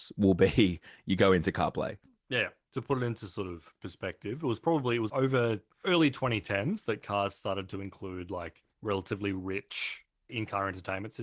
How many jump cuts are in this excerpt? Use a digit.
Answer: 2